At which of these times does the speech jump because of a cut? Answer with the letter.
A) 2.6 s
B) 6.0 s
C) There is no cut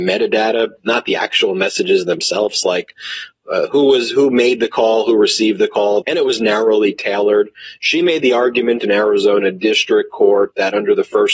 B